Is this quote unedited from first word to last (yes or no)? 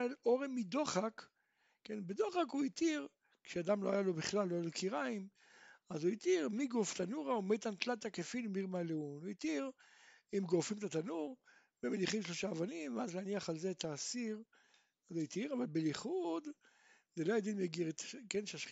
yes